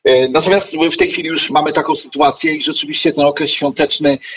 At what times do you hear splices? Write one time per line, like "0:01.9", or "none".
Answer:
0:01.5